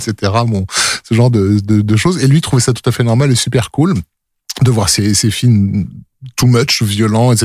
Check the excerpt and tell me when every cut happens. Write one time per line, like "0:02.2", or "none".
none